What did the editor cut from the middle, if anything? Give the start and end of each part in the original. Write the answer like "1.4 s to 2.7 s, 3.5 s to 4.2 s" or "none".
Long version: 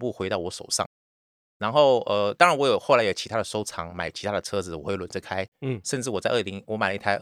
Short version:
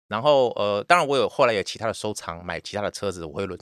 none